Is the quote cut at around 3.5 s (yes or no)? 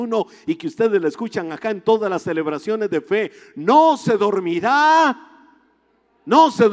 no